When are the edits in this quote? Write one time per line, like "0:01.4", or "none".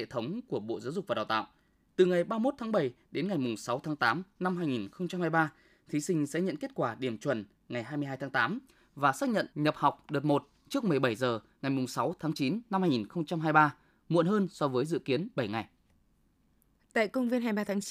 0:01.9
0:09.5